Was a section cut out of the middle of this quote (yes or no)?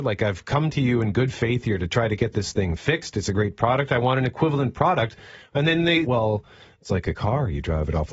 yes